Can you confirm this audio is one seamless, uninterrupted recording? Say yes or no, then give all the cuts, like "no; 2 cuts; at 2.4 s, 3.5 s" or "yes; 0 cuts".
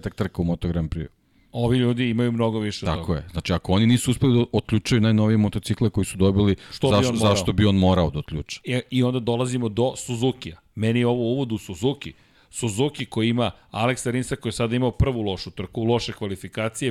yes; 0 cuts